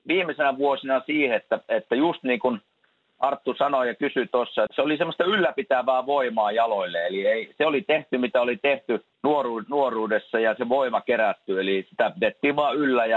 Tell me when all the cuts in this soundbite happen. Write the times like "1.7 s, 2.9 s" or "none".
4.7 s, 9.1 s